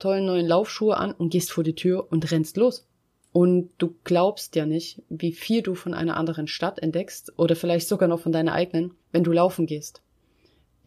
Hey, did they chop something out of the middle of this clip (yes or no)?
yes